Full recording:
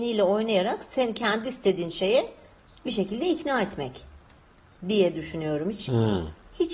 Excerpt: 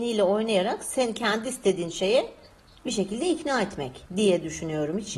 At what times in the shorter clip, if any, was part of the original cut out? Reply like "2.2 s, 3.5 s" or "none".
4.1 s